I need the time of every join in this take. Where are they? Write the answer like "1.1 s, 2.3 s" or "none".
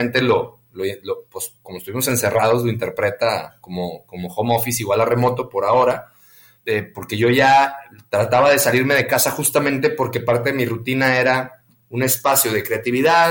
6.5 s